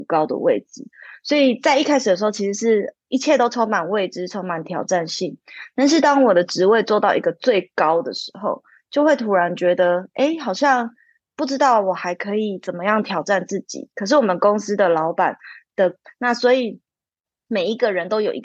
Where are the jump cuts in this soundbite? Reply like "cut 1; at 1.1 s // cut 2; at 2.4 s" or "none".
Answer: cut 1; at 16.0 s